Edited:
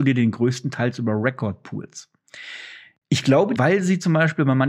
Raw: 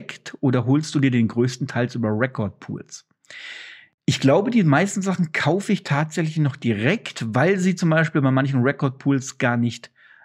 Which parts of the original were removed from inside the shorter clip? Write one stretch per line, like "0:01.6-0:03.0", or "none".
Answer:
0:04.5-0:07.3